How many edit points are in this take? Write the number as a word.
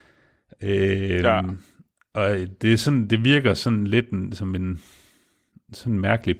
zero